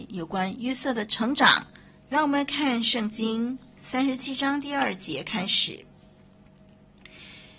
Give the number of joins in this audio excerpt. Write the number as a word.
one